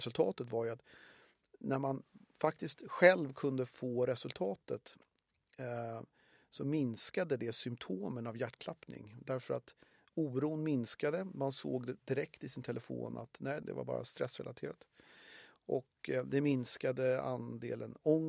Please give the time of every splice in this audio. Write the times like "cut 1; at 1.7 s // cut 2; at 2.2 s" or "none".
cut 1; at 13.6 s